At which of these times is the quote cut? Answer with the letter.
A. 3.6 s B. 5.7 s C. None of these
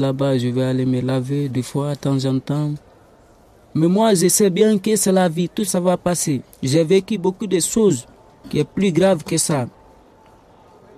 B